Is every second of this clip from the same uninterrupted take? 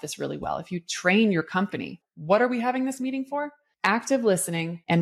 no; 1 cut; at 2.0 s

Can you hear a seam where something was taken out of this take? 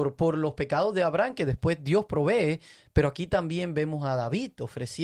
no; 0 cuts

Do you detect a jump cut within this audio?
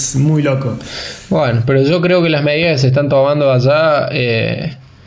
no; 0 cuts

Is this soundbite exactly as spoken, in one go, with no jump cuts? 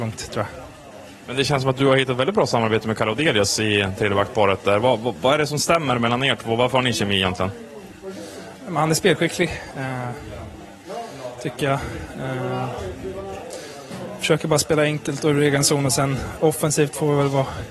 yes; 0 cuts

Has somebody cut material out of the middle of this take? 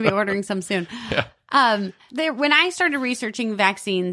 yes; 1 cut; at 2.1 s

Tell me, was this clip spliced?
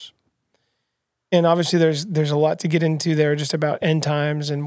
no; 0 cuts

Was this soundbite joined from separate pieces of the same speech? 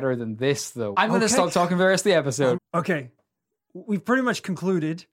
yes; 2 cuts; at 0.9 s, 2.5 s

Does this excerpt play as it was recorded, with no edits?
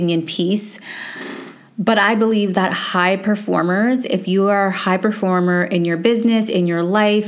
yes; 0 cuts

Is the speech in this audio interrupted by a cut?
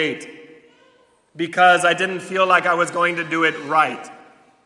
no; 0 cuts

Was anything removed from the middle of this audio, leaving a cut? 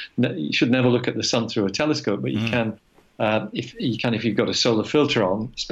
no; 0 cuts

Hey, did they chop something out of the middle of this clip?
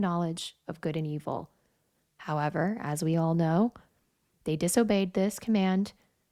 no; 0 cuts

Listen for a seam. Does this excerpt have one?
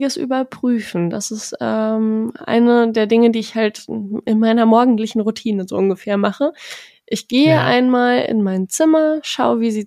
no; 0 cuts

